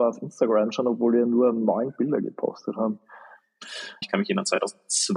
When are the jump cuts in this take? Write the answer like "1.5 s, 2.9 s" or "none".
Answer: 4.0 s

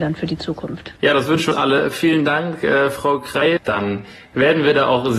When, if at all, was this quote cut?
1.0 s, 3.6 s

